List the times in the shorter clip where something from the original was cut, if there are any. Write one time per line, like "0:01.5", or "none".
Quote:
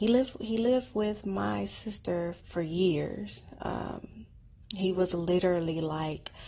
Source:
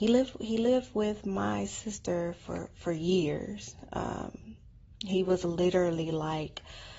0:02.4